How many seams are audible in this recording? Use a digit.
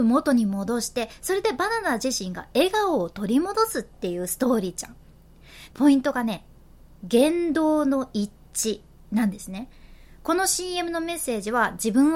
1